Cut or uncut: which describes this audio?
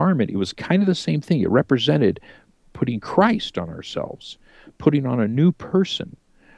uncut